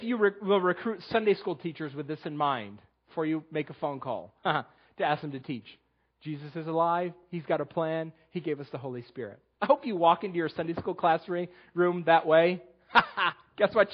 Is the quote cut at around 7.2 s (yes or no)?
no